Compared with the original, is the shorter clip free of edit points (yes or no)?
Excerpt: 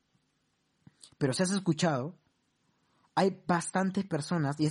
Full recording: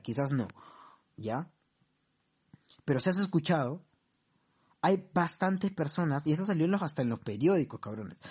yes